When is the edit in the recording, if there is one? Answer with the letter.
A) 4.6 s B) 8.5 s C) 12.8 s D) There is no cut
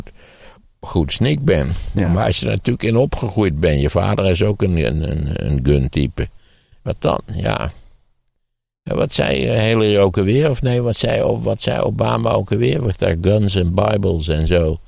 D